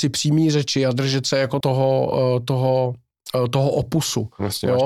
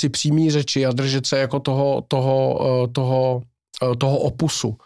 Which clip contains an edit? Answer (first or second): first